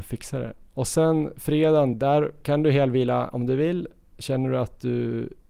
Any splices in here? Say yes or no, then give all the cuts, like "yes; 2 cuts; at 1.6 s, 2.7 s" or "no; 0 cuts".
yes; 1 cut; at 1.9 s